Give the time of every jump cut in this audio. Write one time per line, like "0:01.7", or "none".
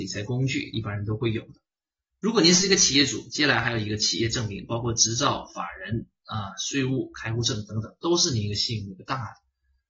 none